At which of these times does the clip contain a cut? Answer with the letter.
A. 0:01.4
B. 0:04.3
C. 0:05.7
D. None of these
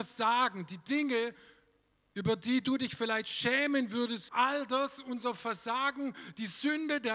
B